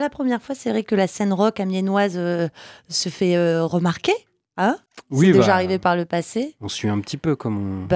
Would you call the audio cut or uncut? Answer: cut